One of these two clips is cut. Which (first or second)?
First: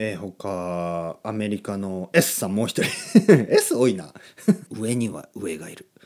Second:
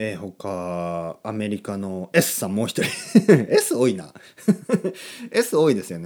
first